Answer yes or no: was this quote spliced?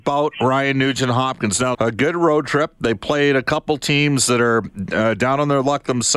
yes